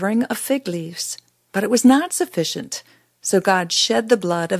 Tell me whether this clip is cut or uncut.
uncut